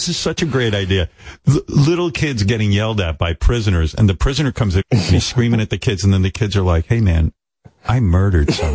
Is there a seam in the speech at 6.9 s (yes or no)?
no